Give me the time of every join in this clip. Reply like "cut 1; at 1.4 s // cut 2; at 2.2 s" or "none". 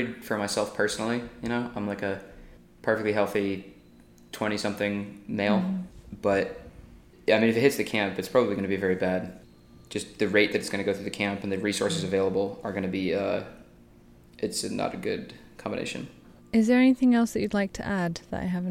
cut 1; at 16.4 s